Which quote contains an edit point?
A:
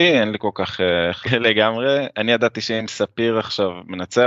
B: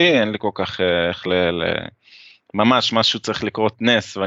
A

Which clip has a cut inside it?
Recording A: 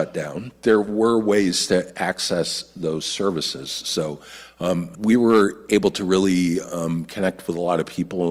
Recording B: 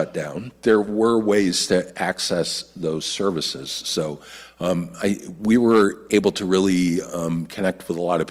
A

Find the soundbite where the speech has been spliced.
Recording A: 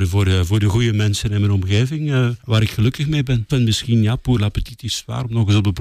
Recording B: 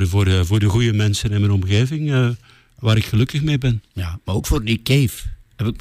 A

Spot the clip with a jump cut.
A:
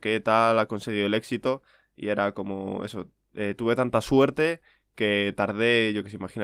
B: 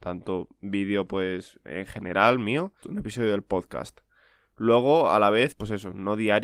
B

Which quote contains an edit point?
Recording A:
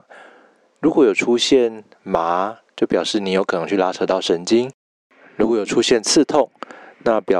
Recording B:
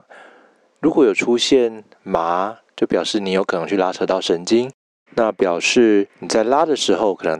B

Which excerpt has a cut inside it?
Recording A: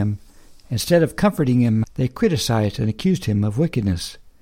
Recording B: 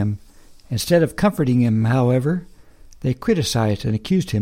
A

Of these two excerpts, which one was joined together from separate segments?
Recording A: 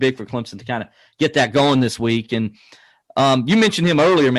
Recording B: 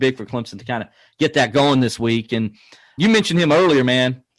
B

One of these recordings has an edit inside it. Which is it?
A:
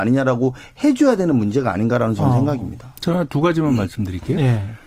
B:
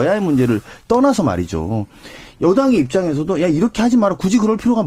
A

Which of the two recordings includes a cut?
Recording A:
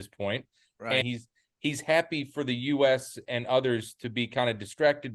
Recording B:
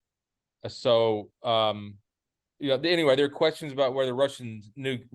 A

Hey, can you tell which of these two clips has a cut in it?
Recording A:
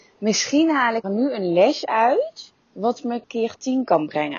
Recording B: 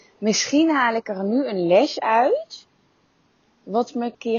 A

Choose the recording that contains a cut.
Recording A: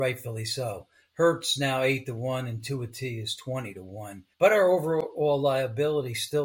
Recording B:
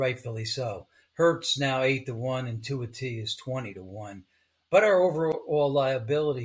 A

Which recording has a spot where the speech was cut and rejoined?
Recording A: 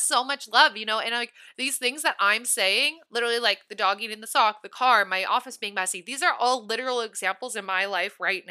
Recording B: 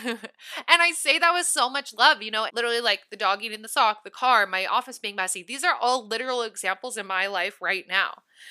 B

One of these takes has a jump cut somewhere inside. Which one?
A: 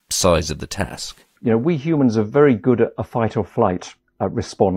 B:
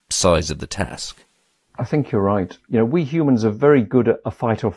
A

